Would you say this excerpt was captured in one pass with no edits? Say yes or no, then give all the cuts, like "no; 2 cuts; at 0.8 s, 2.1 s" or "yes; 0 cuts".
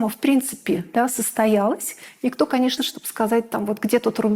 no; 1 cut; at 2.8 s